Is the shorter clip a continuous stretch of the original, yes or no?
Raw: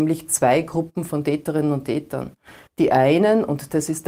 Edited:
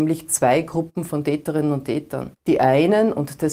no